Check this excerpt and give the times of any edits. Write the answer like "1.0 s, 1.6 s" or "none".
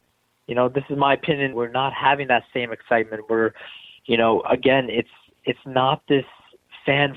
1.5 s